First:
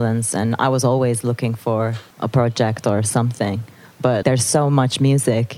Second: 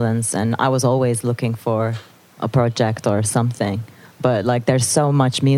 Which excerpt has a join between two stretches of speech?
first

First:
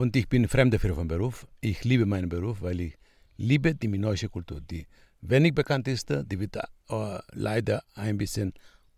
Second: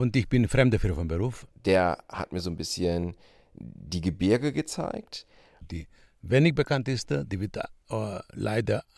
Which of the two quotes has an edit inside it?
second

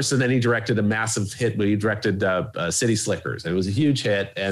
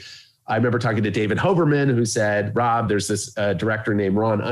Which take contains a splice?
second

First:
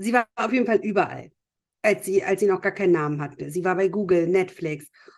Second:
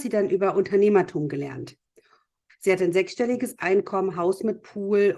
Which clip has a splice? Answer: second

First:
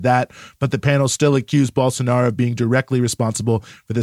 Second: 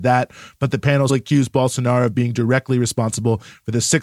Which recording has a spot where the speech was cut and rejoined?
second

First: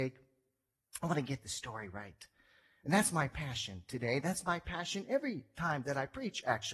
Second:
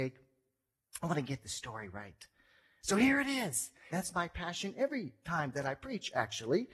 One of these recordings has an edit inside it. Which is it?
second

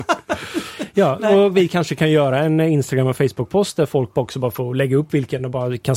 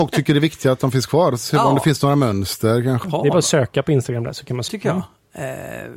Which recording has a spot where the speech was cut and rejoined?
second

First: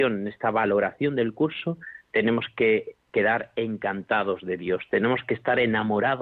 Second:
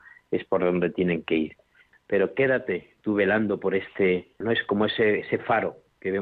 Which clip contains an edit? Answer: second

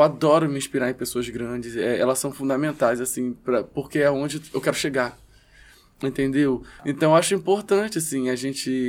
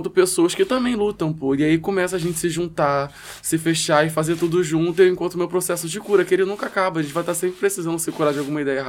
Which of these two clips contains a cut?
first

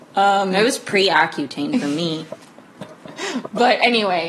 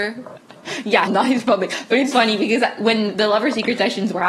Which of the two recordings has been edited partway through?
second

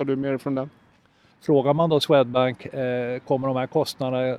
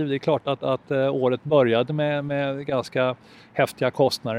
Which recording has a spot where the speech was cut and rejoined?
first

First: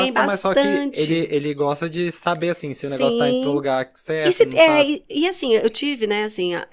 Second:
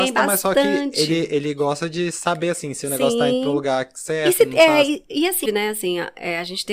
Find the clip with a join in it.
second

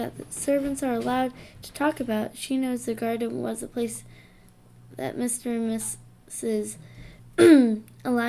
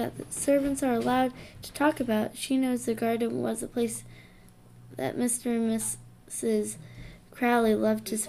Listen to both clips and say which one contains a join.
first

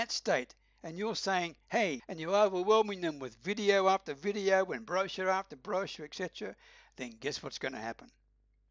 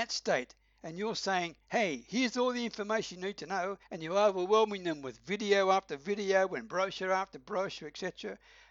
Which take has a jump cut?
first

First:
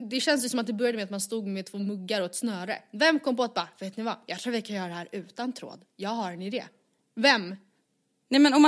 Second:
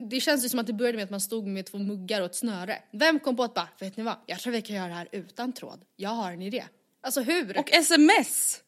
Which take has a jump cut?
second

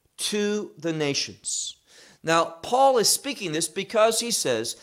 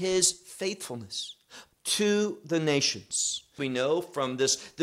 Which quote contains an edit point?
second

